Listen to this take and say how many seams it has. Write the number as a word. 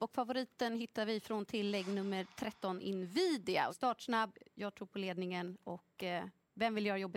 one